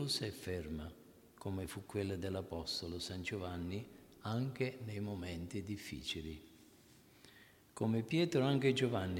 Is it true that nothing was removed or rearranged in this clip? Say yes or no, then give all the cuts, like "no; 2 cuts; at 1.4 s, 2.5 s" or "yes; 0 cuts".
yes; 0 cuts